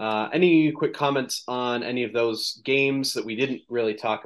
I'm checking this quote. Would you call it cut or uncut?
uncut